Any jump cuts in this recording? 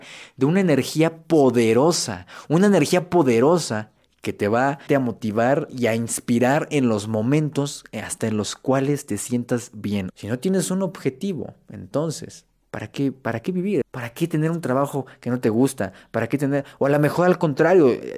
yes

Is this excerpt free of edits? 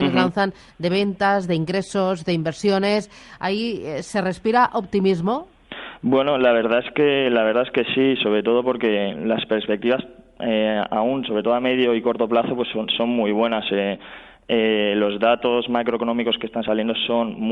yes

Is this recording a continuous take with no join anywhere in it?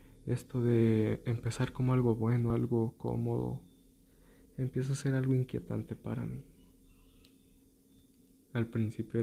yes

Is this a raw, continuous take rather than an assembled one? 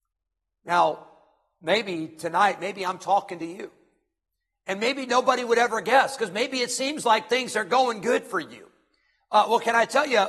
yes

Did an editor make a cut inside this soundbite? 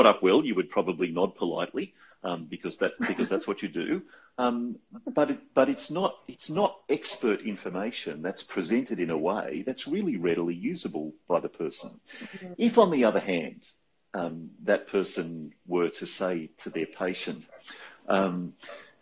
no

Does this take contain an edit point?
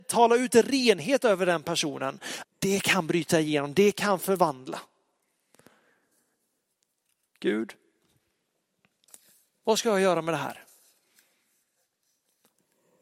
yes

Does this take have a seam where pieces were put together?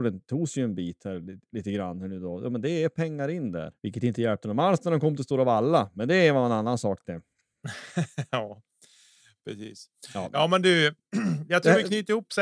yes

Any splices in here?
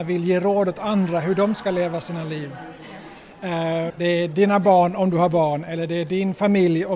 yes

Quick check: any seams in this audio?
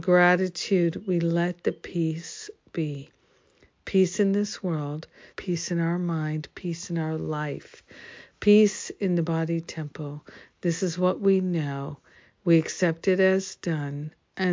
yes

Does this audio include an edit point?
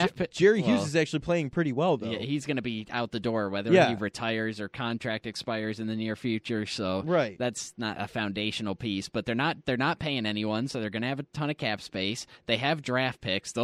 no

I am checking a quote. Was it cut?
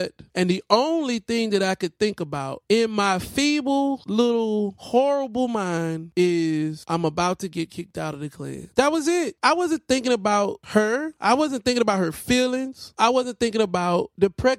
no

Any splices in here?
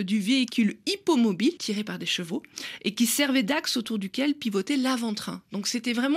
yes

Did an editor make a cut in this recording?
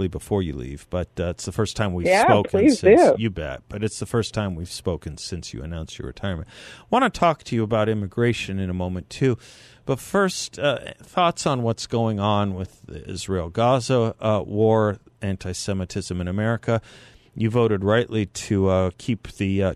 no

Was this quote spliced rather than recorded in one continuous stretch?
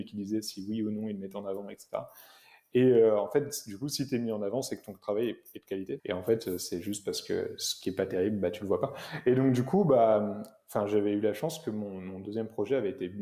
yes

